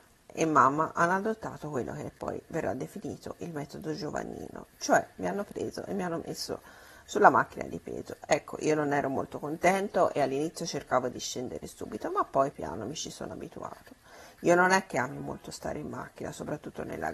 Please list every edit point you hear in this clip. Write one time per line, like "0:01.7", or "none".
0:12.5